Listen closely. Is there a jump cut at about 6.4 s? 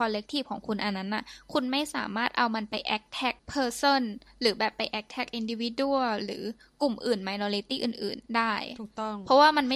no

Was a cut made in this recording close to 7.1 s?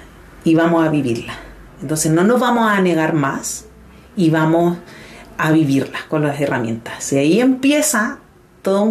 no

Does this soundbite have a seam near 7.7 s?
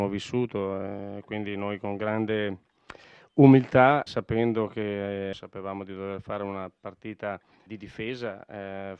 yes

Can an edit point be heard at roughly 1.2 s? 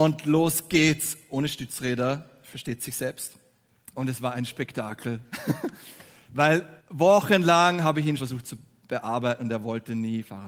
no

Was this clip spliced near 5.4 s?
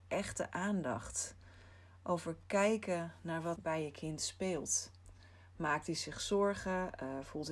no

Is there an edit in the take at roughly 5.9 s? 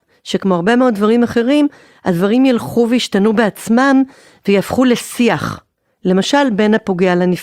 no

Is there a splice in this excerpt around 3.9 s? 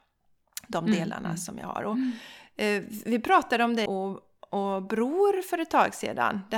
yes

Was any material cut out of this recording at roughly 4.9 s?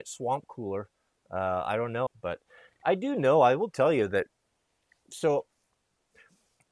no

